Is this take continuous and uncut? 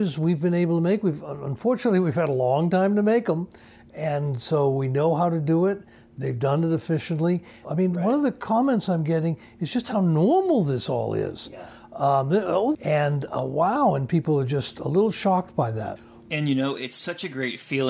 no; 2 cuts; at 7.6 s, 12.7 s

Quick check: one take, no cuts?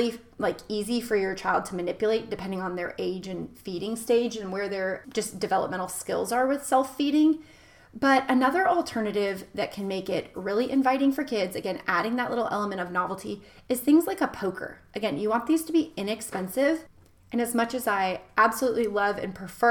yes; 0 cuts

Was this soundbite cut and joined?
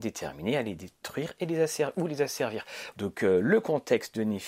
yes; 1 cut; at 2.9 s

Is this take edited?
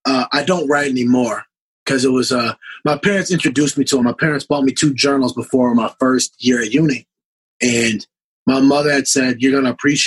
no; 0 cuts

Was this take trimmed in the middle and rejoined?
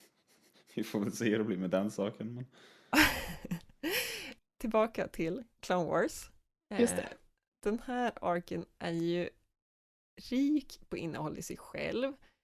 yes; 1 cut; at 4.4 s

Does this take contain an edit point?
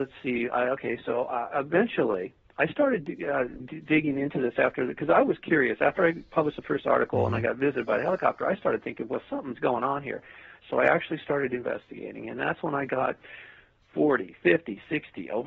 yes; 1 cut; at 3.6 s

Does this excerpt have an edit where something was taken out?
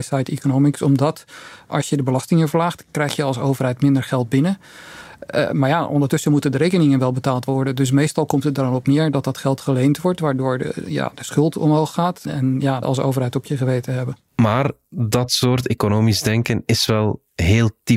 yes; 1 cut; at 12.8 s

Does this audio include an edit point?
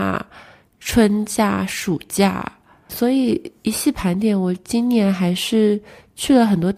yes; 1 cut; at 2.9 s

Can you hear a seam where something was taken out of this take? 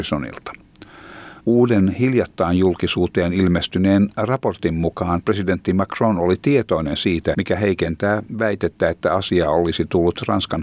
yes; 2 cuts; at 1.4 s, 7.3 s

